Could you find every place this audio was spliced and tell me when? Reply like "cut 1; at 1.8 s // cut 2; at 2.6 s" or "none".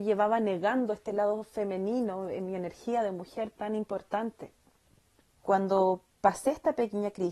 cut 1; at 5.2 s

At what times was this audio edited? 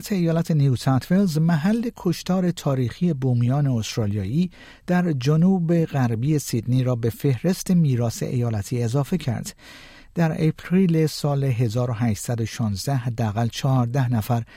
none

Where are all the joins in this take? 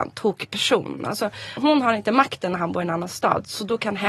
cut 1; at 1.6 s

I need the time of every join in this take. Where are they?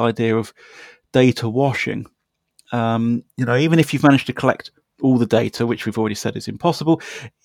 none

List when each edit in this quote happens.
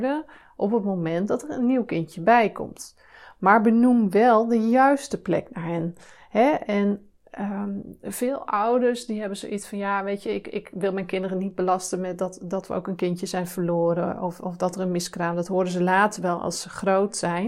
none

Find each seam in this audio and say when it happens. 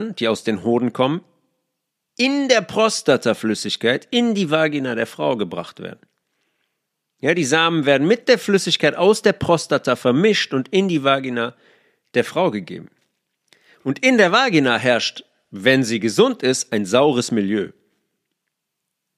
none

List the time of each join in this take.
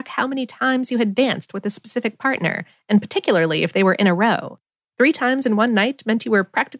none

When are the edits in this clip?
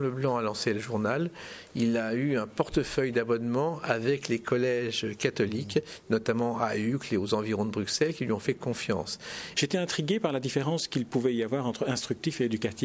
cut 1; at 9.5 s

